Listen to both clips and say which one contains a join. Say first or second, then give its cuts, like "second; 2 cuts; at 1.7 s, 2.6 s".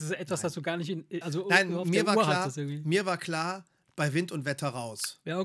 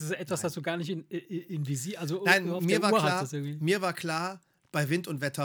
first; 1 cut; at 1.2 s